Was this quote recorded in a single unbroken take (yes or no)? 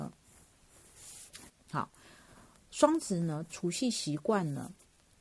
no